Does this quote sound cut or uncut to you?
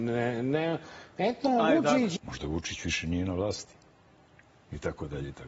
cut